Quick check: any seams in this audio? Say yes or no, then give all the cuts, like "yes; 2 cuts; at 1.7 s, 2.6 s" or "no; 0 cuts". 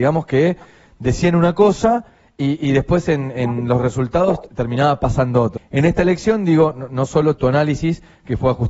yes; 2 cuts; at 5.6 s, 7.4 s